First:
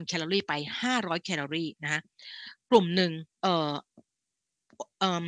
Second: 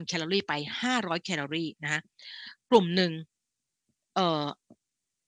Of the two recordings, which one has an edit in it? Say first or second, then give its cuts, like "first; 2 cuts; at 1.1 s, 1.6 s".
first; 1 cut; at 3.3 s